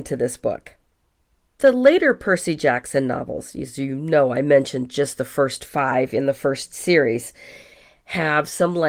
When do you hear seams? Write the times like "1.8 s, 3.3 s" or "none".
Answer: none